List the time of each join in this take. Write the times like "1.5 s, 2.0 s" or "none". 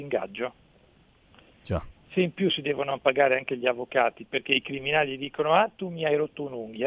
2.0 s

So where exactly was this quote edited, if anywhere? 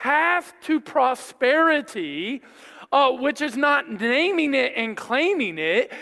none

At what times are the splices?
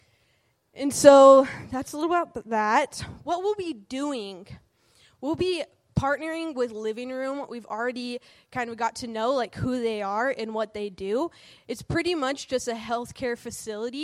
none

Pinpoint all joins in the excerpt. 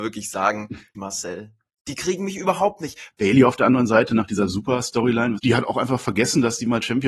0.9 s, 3.1 s, 5.4 s

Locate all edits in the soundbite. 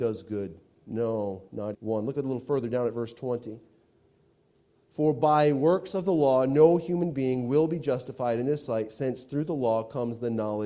1.7 s

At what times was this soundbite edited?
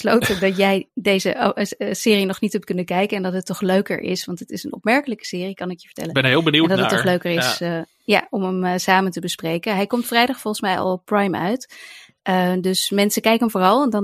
none

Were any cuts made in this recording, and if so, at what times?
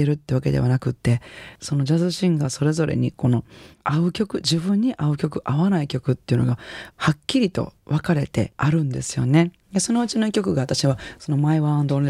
6.9 s

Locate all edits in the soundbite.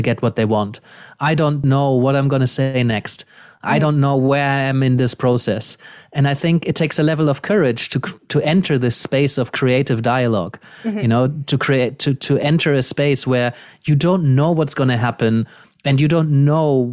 1.6 s

